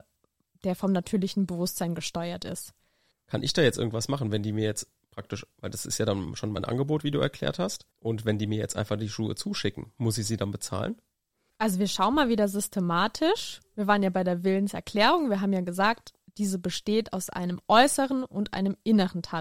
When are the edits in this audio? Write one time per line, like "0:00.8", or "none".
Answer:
0:03.1
0:07.9